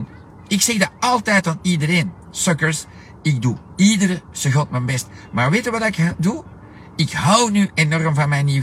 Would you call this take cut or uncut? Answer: uncut